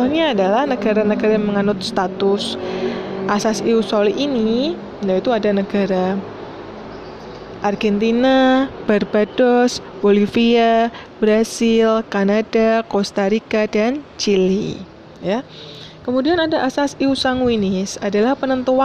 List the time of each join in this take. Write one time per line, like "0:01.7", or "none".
none